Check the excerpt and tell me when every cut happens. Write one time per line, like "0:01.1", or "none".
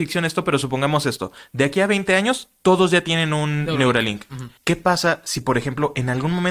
0:04.6